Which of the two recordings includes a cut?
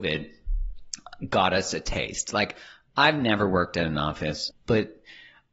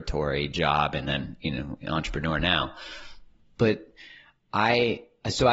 first; 1 cut; at 4.5 s

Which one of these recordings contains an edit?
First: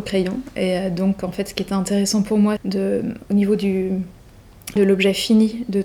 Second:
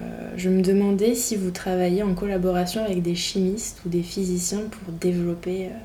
first; 2 cuts; at 2.6 s, 4.8 s

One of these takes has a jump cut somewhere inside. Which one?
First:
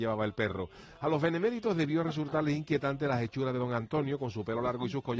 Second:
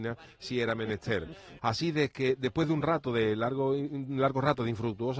second; 1 cut; at 1.6 s

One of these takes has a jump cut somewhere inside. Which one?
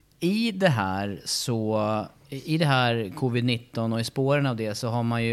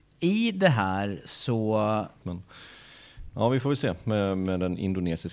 second; 2 cuts; at 2.2 s, 3.3 s

